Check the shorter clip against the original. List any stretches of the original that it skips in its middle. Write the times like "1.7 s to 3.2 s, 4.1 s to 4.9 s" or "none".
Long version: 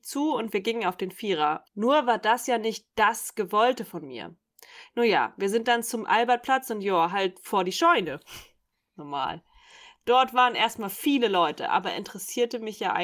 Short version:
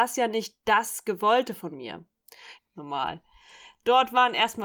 4.9 s to 8.8 s